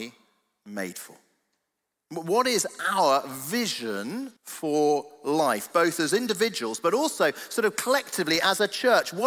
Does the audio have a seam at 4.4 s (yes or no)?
yes